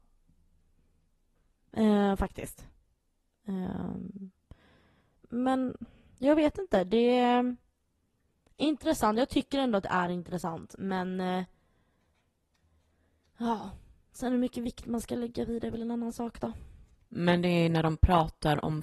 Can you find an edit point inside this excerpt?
yes; 2 cuts; at 5.2 s, 17.1 s

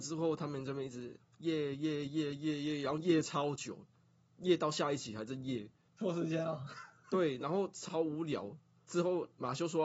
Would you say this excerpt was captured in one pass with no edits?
yes; 0 cuts

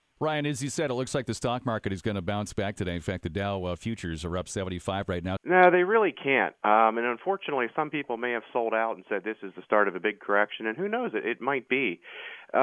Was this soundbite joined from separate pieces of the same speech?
yes; 1 cut; at 5.4 s

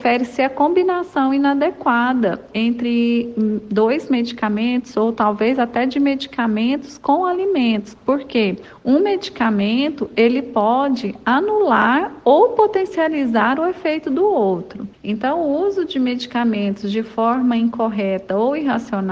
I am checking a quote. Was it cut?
no; 0 cuts

